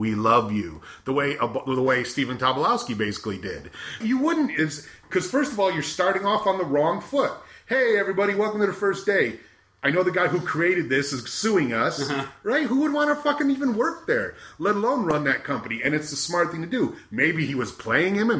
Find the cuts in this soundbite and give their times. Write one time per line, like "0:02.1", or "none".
0:04.0